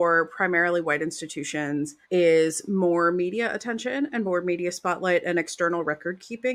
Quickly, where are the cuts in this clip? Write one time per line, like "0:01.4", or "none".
0:02.0